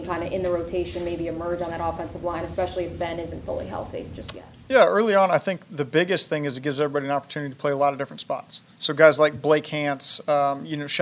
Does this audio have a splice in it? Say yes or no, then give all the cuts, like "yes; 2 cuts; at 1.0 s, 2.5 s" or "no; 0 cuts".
no; 0 cuts